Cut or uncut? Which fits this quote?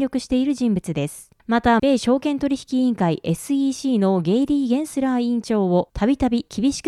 cut